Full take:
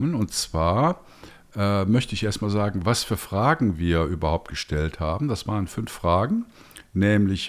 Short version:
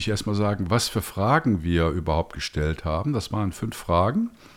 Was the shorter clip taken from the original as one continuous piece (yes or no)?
yes